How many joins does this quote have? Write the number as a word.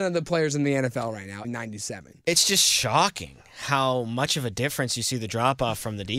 one